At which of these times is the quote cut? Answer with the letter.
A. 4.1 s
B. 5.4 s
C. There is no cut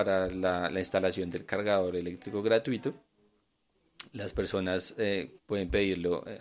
B